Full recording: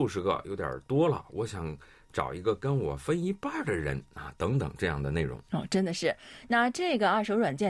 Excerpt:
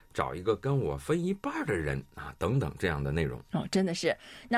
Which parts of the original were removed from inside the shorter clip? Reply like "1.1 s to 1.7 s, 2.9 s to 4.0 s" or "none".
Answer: none